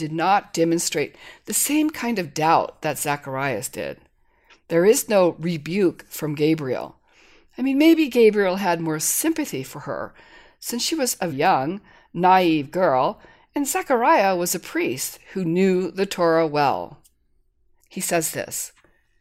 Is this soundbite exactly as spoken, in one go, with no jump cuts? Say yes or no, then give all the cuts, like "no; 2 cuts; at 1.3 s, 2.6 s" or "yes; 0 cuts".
no; 2 cuts; at 11.3 s, 17.8 s